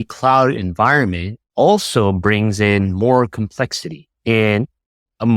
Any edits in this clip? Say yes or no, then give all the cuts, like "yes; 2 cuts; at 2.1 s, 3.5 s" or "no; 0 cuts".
yes; 1 cut; at 1.5 s